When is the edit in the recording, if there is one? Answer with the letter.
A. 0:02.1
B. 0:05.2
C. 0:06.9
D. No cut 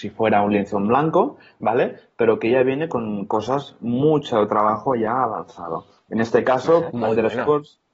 C